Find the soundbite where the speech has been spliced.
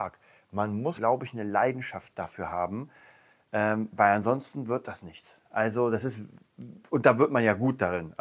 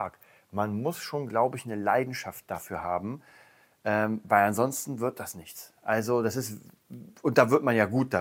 first; 1 cut; at 1.0 s

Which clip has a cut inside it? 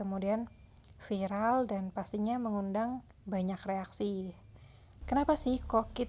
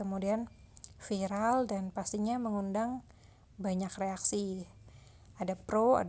first; 2 cuts; at 3.1 s, 5.0 s

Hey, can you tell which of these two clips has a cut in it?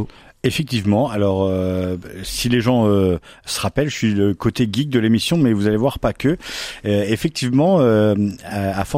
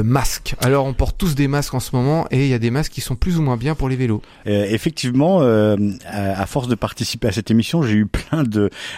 second; 1 cut; at 4.4 s

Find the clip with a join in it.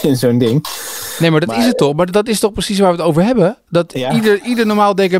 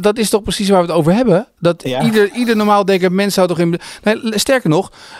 first; 1 cut; at 2.1 s

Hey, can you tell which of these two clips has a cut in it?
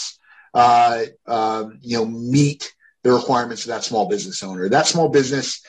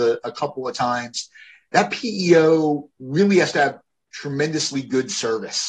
first; 1 cut; at 1.2 s

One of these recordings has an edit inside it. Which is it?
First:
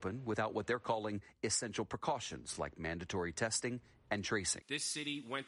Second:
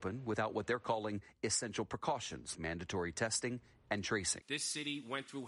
second; 1 cut; at 2.5 s

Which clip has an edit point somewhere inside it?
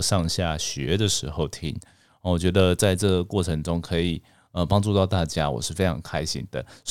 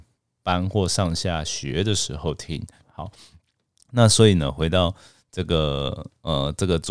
second; 1 cut; at 2.8 s

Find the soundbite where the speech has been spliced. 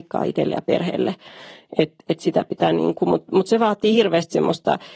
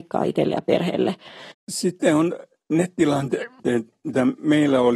second; 1 cut; at 1.5 s

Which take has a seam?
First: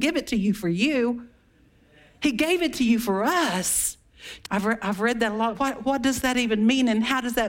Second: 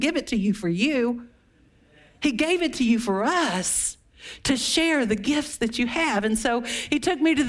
first; 2 cuts; at 4.4 s, 5.5 s

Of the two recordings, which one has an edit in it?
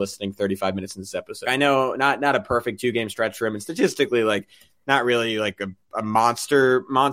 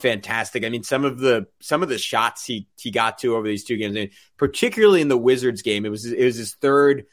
first; 1 cut; at 1.4 s

